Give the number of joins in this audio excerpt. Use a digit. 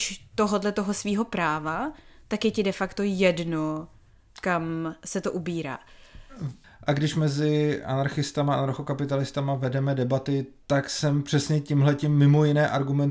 2